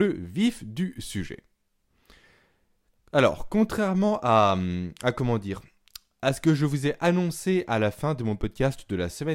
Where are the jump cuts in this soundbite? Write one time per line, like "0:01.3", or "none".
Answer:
none